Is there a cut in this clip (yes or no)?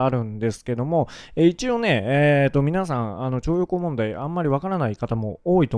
no